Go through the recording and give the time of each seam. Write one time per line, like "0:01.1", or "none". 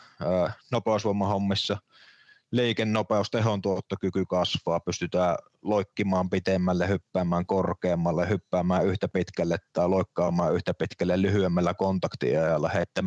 none